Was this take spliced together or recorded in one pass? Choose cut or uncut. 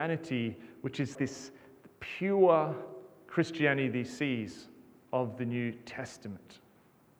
cut